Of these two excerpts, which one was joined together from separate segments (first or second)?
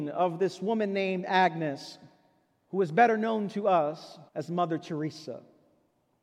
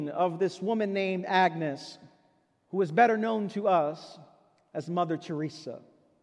first